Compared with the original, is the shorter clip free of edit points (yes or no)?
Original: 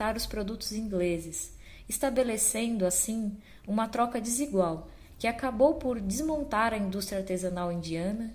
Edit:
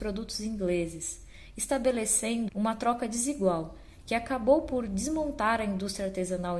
no